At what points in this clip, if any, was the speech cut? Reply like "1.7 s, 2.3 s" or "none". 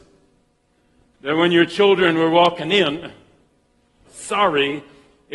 4.0 s